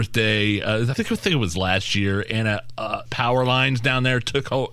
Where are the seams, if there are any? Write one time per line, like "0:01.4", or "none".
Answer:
0:00.9
0:03.1